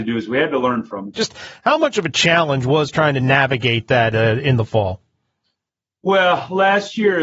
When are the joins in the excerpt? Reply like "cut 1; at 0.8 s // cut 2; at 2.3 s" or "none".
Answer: cut 1; at 1.1 s